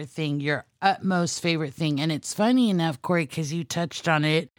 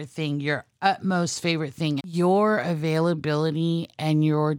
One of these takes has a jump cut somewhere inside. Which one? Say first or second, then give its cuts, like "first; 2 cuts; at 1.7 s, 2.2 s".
second; 1 cut; at 2.0 s